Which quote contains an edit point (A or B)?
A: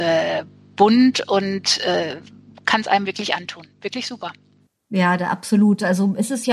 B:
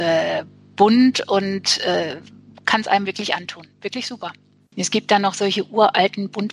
B